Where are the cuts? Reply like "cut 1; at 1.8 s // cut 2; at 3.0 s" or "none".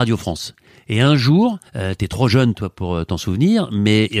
cut 1; at 1.7 s